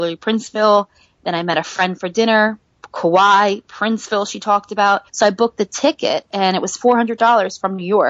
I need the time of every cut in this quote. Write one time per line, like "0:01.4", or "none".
0:05.1